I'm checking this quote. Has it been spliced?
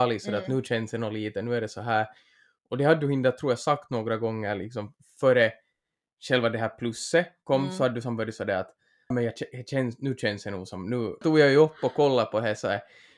yes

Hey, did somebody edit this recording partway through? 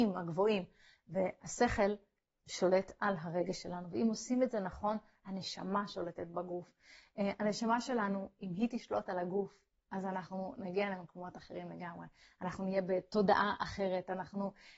no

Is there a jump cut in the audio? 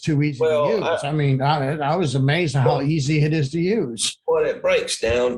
no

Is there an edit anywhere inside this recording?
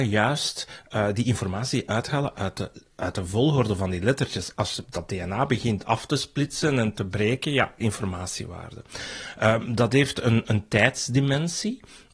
yes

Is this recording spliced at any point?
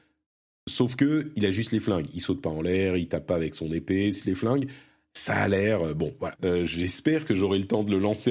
yes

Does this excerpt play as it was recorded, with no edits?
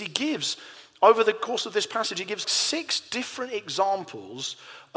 no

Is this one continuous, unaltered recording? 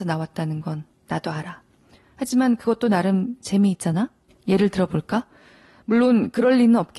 no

